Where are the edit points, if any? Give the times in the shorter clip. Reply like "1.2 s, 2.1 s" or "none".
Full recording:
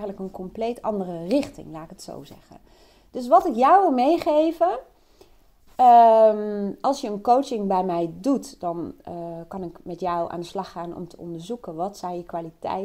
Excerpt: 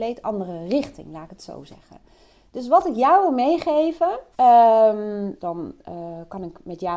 4.3 s, 5.4 s

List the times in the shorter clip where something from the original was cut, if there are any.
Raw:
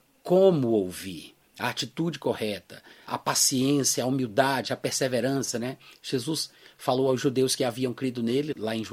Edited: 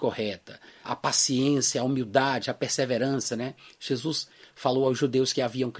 none

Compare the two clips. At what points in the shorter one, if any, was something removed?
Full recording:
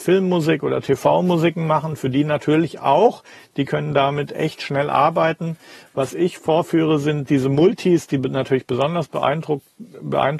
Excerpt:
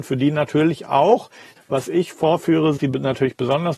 1.6 s, 2.8 s

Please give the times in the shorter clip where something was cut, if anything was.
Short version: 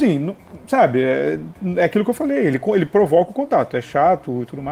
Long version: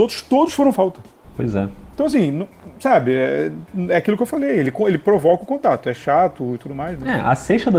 none

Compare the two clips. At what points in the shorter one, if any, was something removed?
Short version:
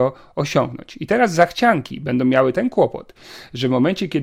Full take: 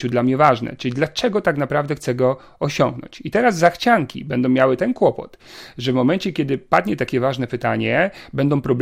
none

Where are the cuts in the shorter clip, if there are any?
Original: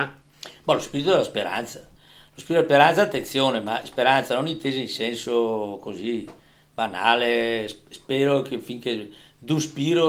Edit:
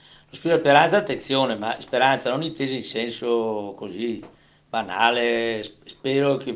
none

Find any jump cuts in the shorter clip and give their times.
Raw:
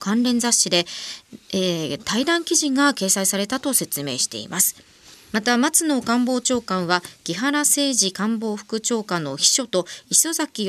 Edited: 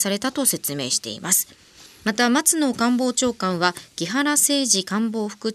none

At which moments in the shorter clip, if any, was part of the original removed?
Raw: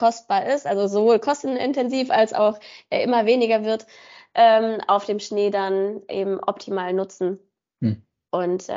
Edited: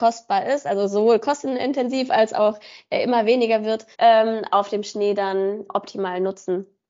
3.9 s, 5.7 s

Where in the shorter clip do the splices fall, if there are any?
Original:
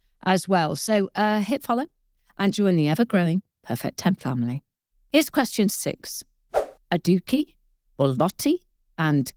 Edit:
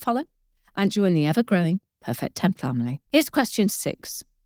3.1 s

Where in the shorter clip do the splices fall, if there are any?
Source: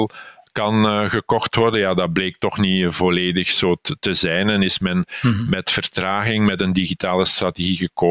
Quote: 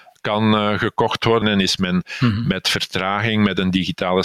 1.4 s

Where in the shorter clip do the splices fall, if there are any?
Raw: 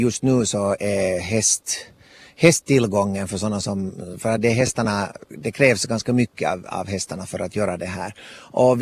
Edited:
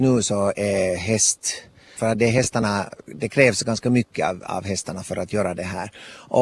2.0 s

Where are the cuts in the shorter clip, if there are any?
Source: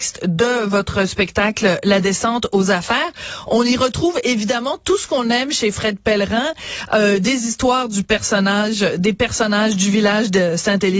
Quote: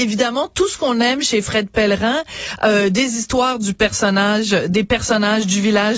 none

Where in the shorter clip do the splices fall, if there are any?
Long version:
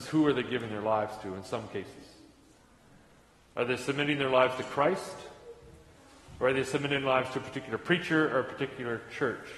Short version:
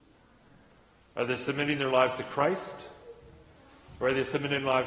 none

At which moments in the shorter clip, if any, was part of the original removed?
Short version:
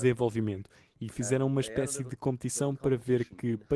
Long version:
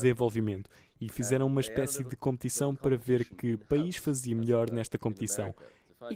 none

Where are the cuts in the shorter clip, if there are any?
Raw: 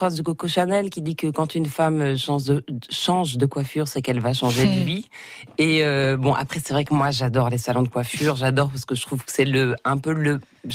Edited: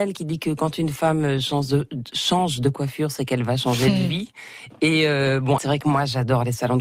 5.6 s

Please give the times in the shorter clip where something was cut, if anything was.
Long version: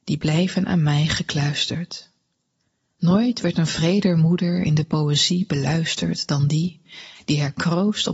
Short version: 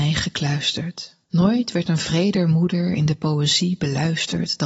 1.2 s

